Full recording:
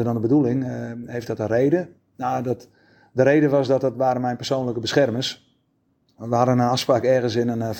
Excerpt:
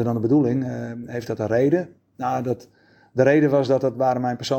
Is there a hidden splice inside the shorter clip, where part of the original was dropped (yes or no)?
no